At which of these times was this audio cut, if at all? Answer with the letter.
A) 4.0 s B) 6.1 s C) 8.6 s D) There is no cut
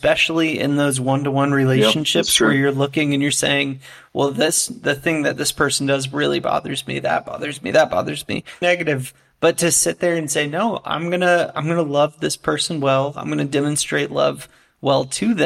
C